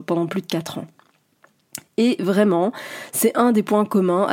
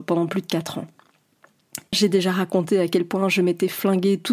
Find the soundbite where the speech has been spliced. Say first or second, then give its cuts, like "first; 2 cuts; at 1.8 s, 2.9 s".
second; 1 cut; at 1.9 s